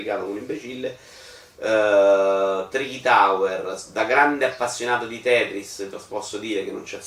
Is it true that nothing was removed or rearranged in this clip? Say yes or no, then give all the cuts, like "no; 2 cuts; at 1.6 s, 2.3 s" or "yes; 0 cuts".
yes; 0 cuts